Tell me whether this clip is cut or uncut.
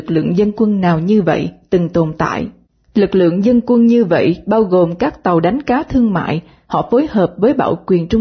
cut